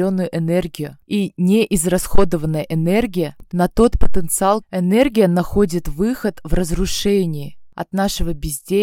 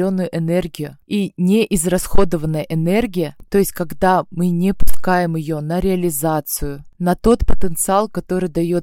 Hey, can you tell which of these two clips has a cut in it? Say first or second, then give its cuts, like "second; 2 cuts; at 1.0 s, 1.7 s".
first; 2 cuts; at 3.5 s, 4.6 s